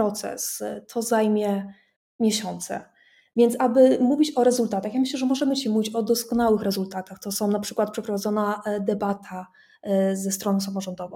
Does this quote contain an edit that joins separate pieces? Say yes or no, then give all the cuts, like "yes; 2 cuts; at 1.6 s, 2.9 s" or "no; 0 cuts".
no; 0 cuts